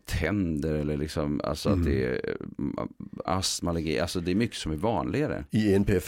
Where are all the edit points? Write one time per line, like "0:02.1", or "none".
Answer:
0:03.3